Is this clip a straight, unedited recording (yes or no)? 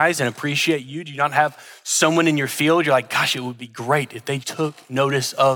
no